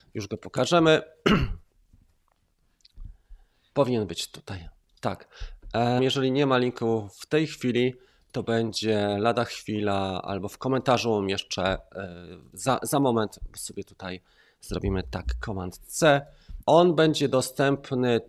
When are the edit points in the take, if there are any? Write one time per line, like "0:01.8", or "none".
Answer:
0:06.0
0:16.6